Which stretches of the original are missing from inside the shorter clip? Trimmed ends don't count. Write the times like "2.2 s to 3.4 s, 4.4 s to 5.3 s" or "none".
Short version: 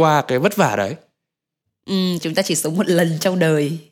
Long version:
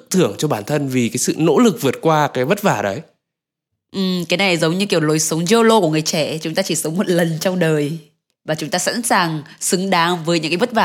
4.3 s to 6.4 s